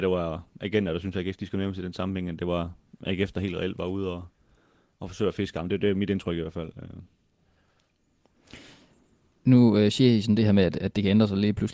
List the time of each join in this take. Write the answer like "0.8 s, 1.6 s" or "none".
none